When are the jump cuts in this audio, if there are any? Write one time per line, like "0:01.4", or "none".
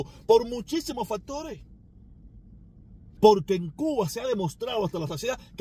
0:03.2